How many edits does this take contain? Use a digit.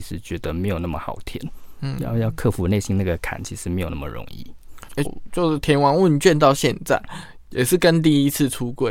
1